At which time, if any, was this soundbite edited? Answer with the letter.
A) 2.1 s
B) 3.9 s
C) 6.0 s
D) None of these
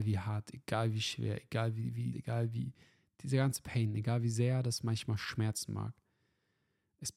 A